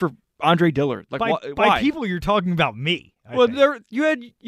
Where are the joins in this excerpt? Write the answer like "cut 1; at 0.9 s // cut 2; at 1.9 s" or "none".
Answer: none